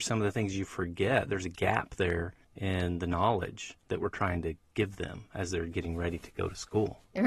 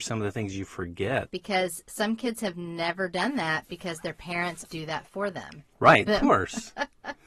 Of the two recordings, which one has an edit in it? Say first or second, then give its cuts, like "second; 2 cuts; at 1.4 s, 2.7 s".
second; 3 cuts; at 1.3 s, 4.7 s, 6.1 s